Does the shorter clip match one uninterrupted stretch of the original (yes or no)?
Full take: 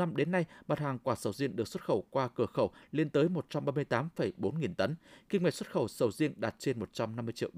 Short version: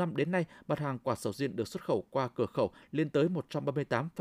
yes